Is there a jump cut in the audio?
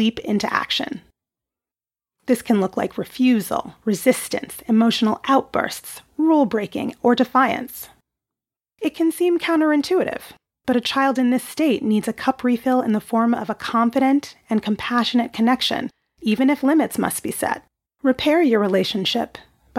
yes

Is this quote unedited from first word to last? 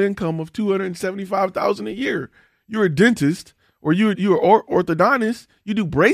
no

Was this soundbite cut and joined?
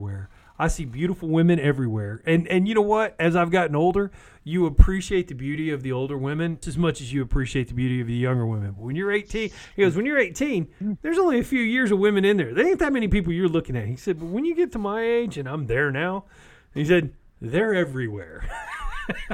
yes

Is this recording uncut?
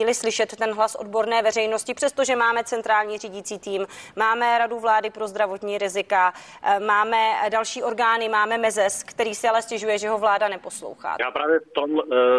no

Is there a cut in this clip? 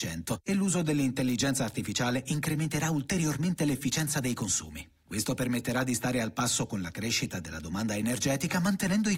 no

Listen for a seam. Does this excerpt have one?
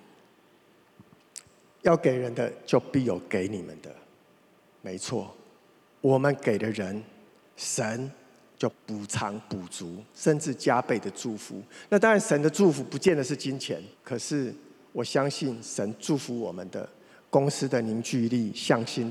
yes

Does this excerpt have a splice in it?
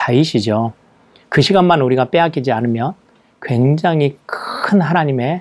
yes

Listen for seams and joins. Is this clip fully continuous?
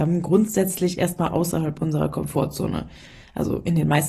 yes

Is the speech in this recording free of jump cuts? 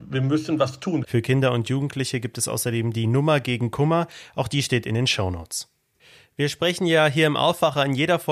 no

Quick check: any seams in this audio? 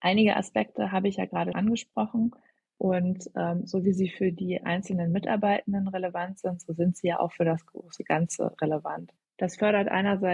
yes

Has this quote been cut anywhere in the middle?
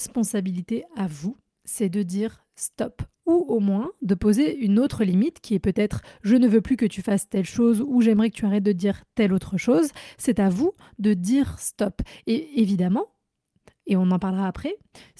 no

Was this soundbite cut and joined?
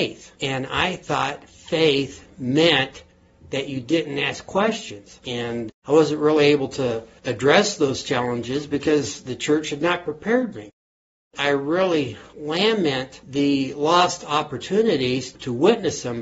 yes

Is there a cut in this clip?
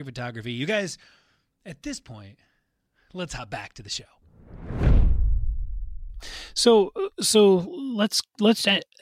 no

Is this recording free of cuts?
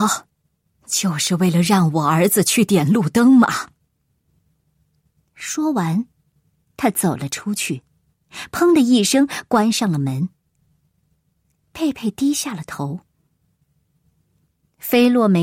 yes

